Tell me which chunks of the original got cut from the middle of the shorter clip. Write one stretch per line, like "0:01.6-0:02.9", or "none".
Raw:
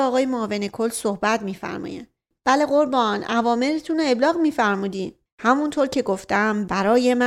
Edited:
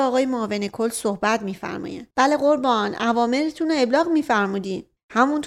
0:02.1-0:02.4